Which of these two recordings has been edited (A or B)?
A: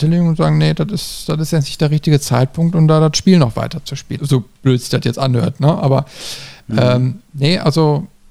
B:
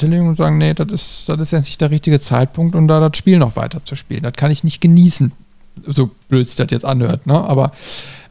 A